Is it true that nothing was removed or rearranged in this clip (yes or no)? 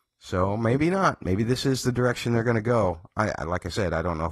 yes